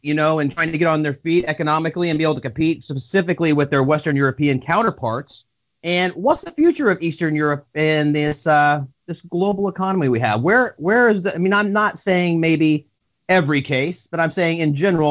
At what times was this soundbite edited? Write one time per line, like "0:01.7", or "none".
0:05.8